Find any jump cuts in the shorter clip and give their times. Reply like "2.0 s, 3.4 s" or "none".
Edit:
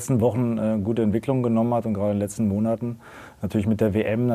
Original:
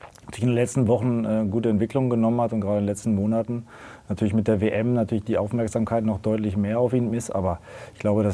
none